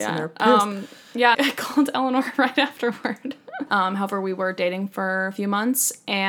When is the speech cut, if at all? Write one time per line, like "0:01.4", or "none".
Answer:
0:01.3
0:03.7